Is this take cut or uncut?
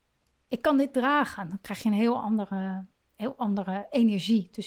uncut